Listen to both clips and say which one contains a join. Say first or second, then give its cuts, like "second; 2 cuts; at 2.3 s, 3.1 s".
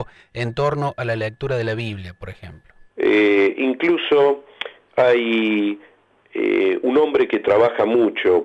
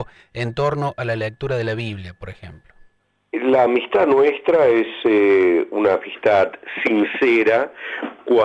first; 1 cut; at 2.9 s